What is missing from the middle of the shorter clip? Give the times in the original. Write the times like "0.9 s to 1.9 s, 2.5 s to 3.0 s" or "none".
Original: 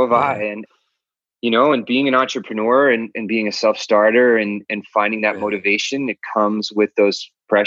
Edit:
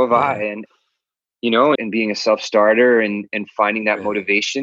1.8 s to 3.1 s